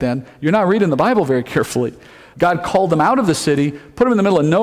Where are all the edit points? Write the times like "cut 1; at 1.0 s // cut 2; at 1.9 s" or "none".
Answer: cut 1; at 2.3 s